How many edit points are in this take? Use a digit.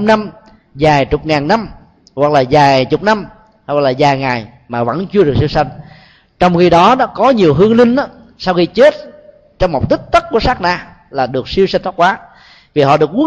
0